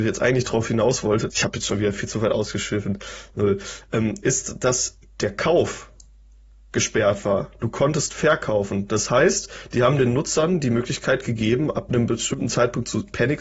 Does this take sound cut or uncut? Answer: uncut